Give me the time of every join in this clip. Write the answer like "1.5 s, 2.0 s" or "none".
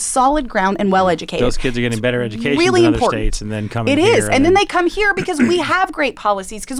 none